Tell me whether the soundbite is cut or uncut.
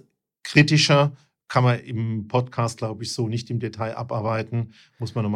uncut